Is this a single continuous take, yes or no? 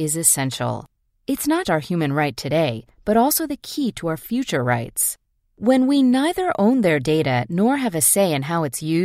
no